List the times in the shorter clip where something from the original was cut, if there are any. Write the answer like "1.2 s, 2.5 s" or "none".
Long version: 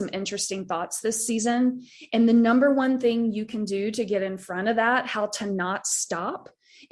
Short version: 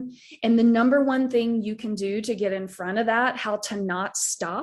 none